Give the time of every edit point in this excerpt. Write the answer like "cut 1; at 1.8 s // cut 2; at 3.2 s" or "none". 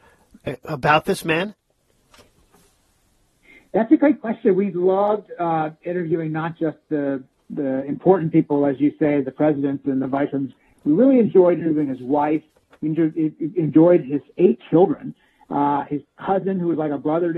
none